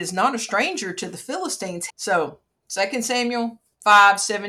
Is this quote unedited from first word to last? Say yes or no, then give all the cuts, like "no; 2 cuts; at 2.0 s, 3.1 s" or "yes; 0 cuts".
no; 1 cut; at 1.9 s